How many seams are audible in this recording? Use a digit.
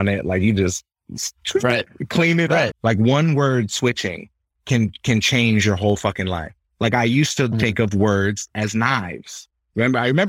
1